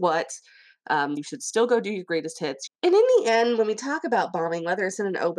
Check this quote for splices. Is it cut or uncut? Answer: cut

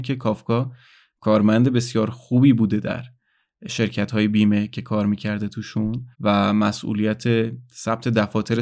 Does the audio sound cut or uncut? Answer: cut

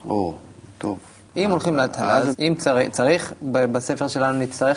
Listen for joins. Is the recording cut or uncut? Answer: cut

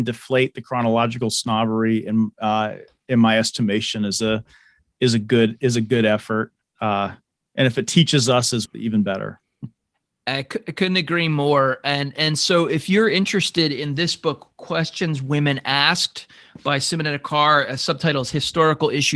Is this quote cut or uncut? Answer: cut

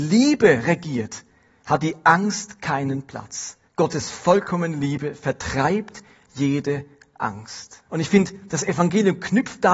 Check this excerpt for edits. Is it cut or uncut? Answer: cut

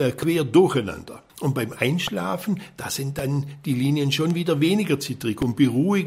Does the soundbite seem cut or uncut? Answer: cut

